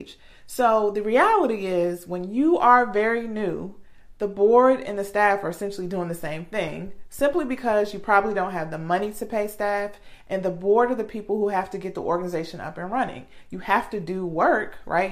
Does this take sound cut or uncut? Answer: uncut